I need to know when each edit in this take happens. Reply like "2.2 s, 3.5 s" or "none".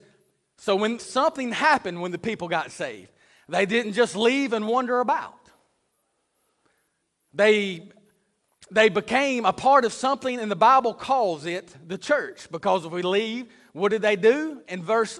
1.0 s